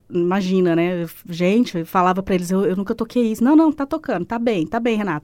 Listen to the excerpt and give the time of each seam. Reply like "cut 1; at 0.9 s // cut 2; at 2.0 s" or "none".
none